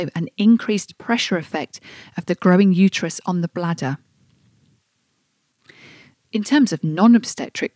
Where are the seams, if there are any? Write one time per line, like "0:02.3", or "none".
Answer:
0:06.1